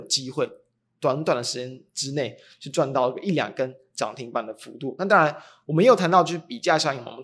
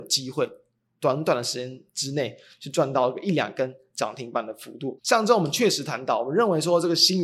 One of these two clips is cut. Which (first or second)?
second